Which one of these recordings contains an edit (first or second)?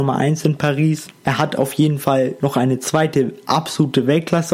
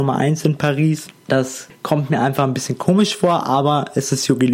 first